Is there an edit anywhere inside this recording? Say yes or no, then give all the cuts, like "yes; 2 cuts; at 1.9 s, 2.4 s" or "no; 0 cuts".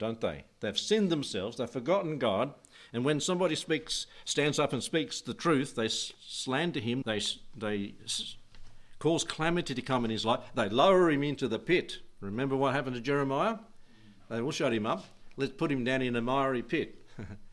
yes; 1 cut; at 7.0 s